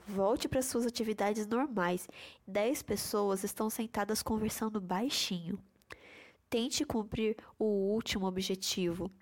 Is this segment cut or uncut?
cut